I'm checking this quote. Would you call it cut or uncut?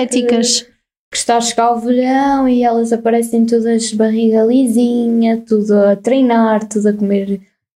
uncut